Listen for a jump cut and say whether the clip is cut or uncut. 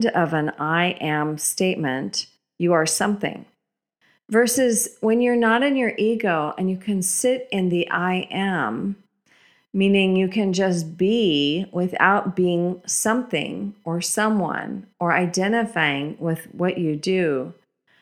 uncut